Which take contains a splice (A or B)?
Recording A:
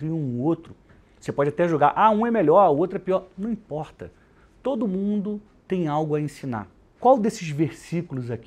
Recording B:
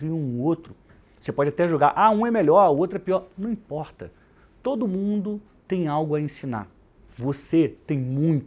A